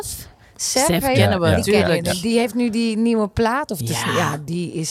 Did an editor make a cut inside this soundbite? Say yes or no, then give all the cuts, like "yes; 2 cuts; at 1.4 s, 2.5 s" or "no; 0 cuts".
no; 0 cuts